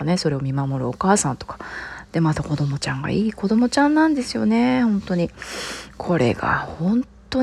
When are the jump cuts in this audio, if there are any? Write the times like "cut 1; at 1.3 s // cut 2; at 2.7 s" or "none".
cut 1; at 5.9 s